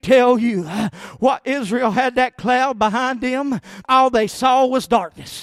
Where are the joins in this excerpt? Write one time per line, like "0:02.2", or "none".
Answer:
0:03.8

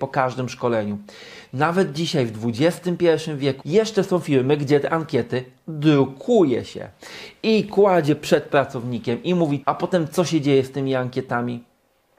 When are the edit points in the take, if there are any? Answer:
0:03.6
0:09.6

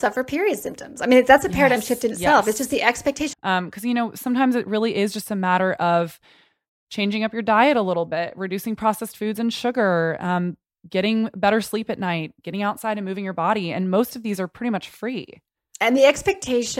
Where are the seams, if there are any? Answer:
0:03.3

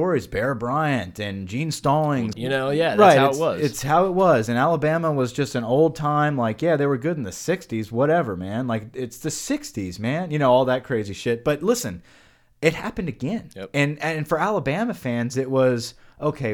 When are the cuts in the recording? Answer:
0:02.3

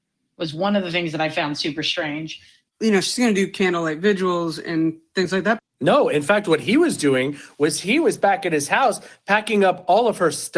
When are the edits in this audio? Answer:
0:02.7
0:05.6

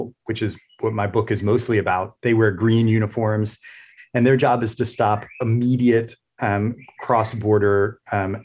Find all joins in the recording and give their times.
0:04.0

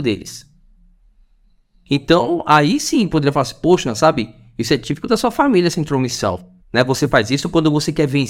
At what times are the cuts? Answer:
0:06.6

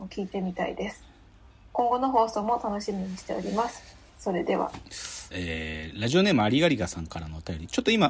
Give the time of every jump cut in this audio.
0:04.1
0:05.3

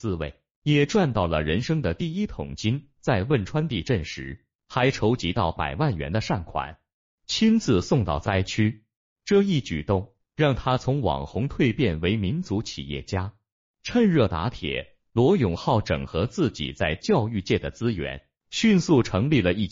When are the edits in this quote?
none

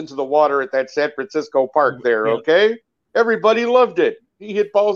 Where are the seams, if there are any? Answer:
none

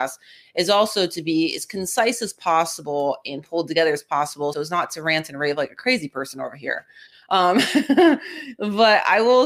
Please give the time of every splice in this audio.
0:04.5

